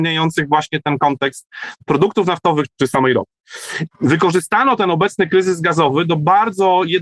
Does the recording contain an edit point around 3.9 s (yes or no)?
yes